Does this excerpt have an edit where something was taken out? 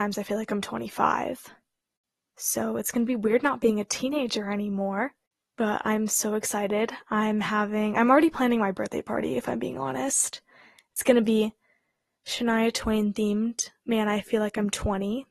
no; 0 cuts

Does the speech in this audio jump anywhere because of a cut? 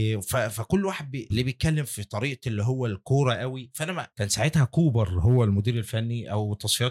yes; 2 cuts; at 1.3 s, 4.1 s

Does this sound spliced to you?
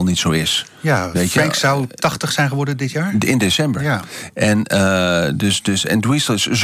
no; 0 cuts

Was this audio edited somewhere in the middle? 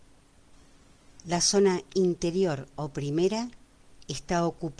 no; 0 cuts

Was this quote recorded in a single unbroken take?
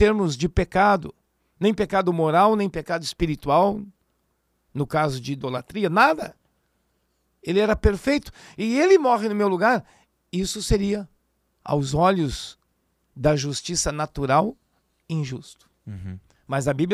yes; 0 cuts

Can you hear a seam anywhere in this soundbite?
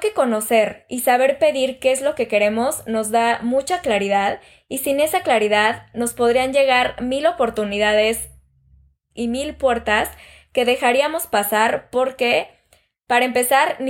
no; 0 cuts

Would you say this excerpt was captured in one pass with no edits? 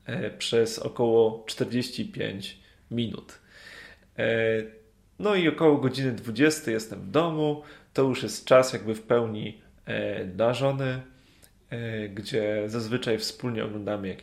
yes; 0 cuts

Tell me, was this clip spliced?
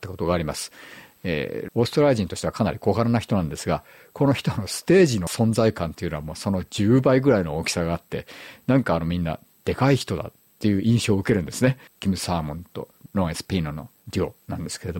yes; 2 cuts; at 1.7 s, 11.9 s

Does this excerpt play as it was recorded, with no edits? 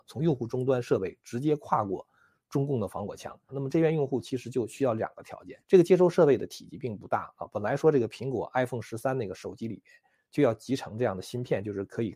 no; 2 cuts; at 3.5 s, 5.6 s

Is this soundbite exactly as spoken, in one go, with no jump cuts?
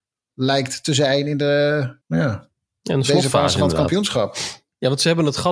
no; 1 cut; at 2.0 s

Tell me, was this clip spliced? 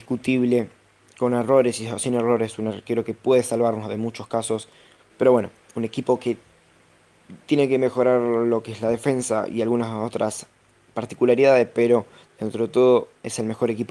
yes; 1 cut; at 5.1 s

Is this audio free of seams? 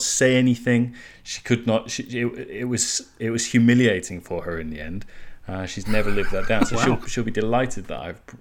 yes; 0 cuts

